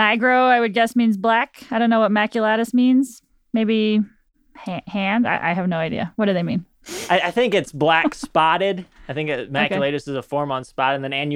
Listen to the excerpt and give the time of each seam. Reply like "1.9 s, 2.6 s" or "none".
none